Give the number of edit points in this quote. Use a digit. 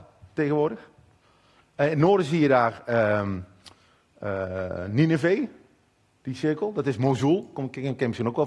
0